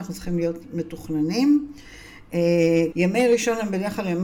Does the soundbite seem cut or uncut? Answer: cut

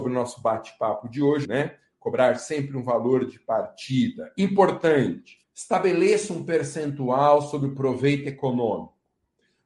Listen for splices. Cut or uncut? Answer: cut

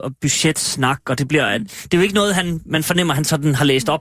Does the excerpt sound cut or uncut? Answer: uncut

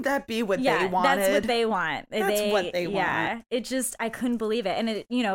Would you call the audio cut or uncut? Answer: uncut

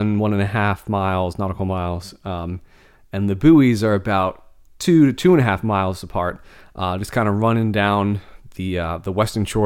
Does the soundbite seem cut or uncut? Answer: uncut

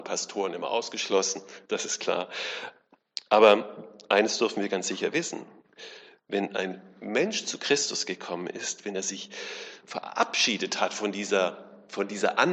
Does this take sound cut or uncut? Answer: cut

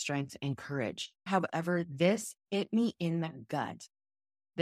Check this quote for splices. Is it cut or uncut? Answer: cut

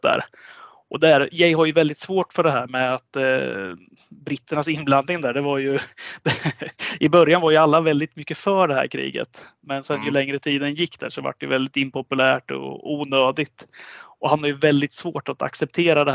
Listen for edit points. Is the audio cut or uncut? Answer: uncut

